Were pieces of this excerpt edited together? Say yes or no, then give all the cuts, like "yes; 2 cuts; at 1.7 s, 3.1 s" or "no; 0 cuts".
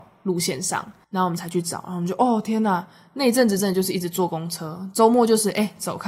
no; 0 cuts